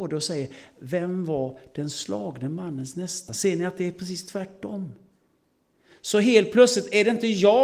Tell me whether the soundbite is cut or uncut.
uncut